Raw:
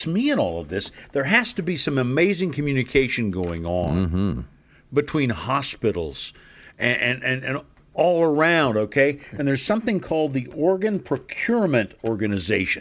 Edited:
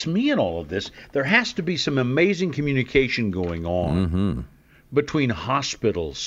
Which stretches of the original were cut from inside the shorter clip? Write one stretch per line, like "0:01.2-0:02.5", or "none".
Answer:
none